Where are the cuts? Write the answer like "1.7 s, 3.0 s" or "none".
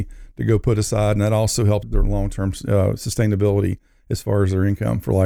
1.8 s